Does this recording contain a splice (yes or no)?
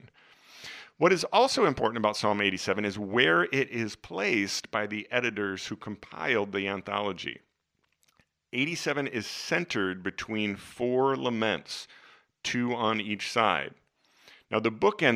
no